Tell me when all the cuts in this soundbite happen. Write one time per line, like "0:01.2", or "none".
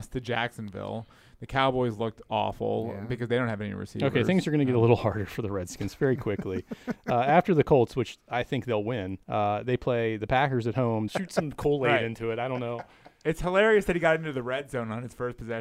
0:09.2
0:11.1